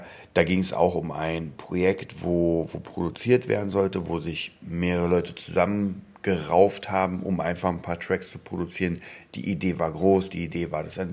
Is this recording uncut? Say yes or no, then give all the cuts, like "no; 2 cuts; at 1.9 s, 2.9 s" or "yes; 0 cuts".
yes; 0 cuts